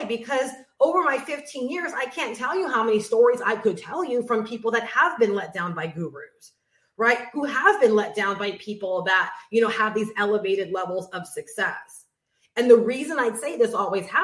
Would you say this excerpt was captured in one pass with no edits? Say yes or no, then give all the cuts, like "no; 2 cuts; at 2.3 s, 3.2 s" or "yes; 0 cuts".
yes; 0 cuts